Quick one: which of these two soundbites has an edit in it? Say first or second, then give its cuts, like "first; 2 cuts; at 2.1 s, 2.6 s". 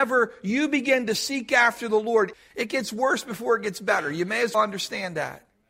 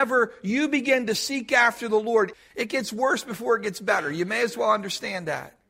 first; 1 cut; at 4.5 s